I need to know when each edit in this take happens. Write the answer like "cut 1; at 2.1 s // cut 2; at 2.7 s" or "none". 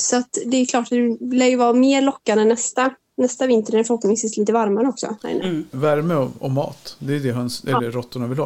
cut 1; at 5.7 s